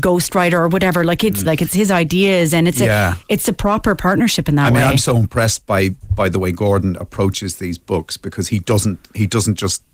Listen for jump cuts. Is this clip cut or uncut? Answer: cut